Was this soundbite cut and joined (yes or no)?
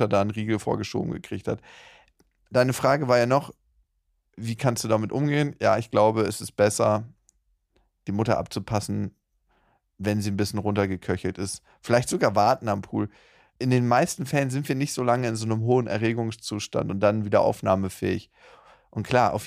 no